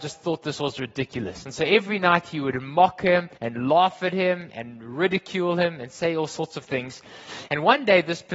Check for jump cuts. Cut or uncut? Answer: cut